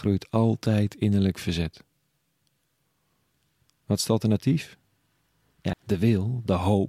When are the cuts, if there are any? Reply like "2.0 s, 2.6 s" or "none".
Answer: 5.7 s

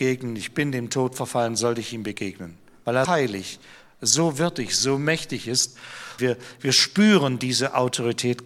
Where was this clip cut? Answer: 3.1 s, 6.2 s

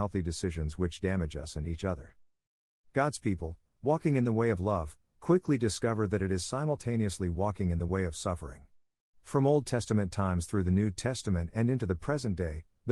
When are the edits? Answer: none

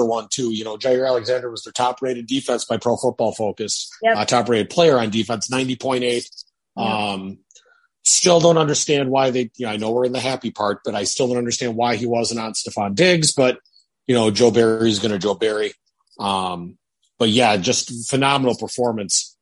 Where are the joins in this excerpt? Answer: none

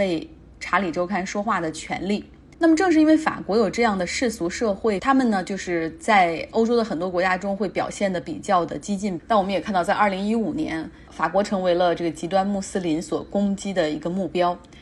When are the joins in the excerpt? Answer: 2.5 s, 5.0 s, 9.2 s

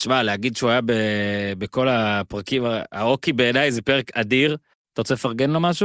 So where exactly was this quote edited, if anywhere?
4.7 s

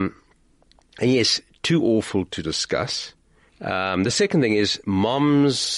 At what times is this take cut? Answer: 3.5 s

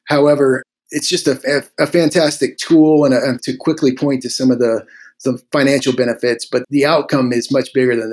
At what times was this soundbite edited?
3.4 s, 6.6 s

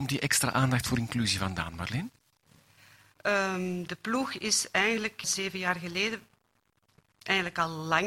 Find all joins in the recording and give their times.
5.2 s

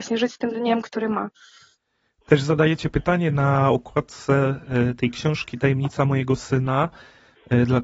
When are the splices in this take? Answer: none

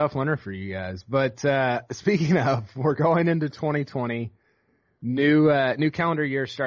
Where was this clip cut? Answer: none

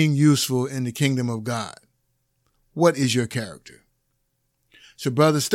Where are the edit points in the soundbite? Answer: none

